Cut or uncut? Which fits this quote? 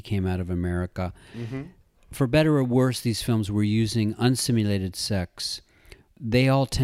uncut